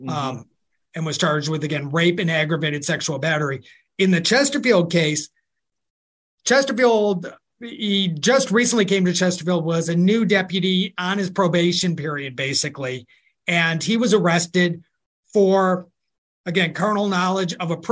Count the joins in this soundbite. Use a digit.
0